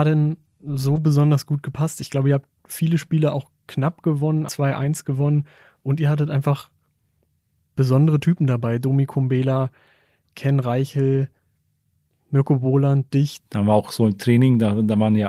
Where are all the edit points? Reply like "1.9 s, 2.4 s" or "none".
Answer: 4.5 s, 13.4 s